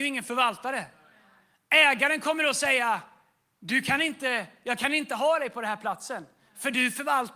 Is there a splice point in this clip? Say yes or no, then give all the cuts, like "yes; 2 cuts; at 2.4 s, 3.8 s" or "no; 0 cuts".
no; 0 cuts